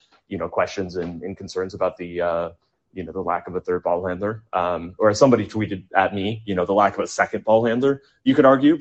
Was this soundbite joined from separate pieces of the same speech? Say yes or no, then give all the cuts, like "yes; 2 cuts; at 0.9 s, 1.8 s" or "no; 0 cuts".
no; 0 cuts